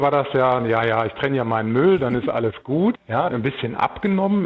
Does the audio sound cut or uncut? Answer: cut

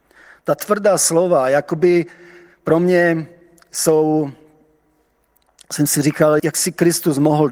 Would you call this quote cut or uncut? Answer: cut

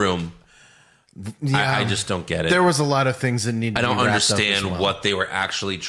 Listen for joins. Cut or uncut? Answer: uncut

